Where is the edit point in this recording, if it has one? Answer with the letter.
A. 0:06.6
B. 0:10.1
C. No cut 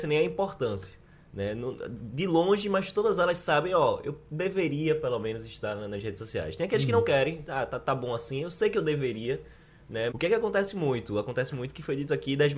B